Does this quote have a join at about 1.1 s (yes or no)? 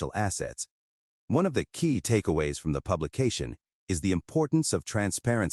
yes